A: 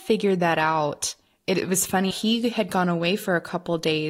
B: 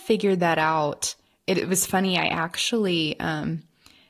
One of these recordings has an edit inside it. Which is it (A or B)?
A